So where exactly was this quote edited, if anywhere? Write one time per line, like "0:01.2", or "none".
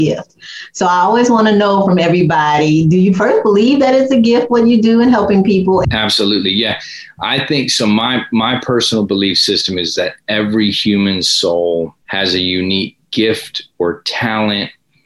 0:05.8
0:12.0

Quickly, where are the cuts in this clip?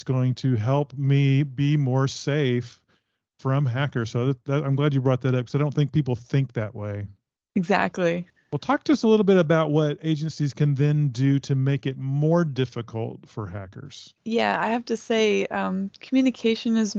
0:14.2

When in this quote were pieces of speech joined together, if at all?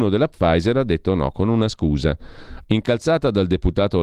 0:02.6

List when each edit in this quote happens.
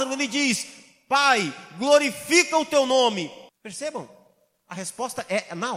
0:03.5

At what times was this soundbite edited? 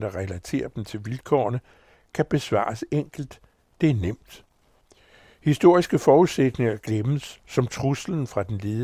none

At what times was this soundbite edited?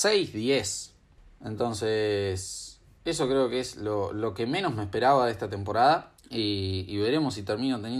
none

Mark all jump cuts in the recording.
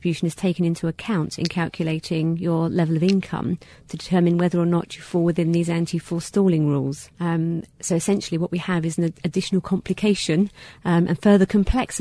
0:07.1

